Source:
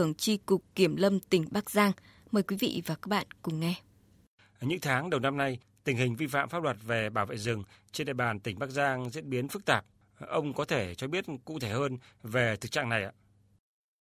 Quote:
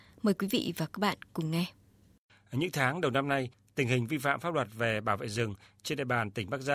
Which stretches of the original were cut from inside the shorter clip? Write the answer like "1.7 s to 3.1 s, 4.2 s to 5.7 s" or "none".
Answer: none